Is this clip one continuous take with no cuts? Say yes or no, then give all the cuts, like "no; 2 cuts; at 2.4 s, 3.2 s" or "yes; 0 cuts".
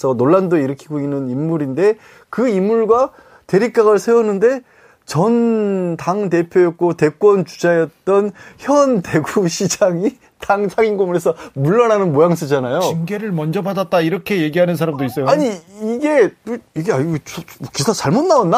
yes; 0 cuts